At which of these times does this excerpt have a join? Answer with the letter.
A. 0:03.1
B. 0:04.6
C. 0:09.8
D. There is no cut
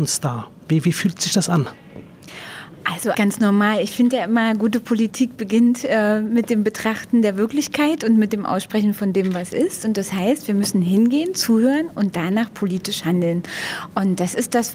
A